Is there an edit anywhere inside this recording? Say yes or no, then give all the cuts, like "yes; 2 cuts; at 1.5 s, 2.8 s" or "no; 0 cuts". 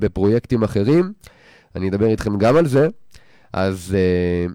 no; 0 cuts